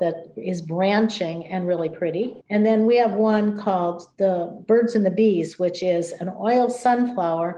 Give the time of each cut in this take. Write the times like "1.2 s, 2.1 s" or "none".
2.4 s